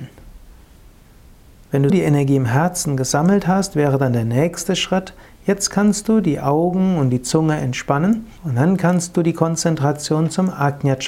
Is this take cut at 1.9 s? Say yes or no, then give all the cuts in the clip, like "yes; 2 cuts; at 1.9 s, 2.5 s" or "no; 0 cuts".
yes; 2 cuts; at 1.9 s, 8.4 s